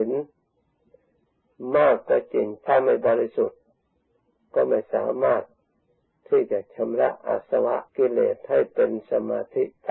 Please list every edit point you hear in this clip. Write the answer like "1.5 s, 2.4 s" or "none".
7.9 s